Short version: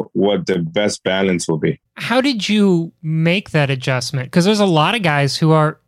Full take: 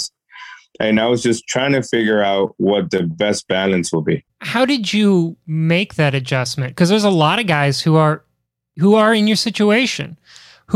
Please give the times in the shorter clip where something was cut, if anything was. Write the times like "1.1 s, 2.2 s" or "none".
none